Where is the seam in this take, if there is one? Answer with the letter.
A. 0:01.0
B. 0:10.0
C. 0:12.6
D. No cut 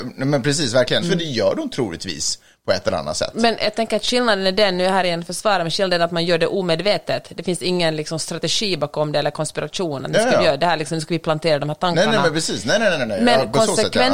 A